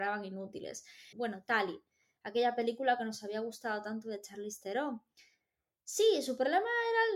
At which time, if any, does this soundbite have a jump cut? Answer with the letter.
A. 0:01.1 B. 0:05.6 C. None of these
A